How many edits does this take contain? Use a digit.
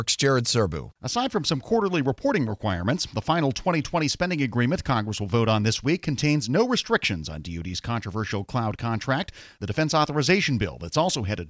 0